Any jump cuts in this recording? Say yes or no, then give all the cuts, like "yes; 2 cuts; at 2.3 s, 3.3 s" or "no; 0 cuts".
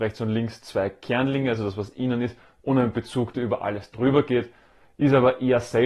no; 0 cuts